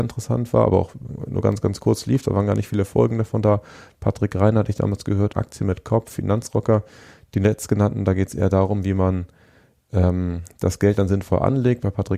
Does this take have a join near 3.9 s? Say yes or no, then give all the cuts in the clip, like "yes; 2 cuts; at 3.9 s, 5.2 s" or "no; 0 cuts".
no; 1 cut; at 5.3 s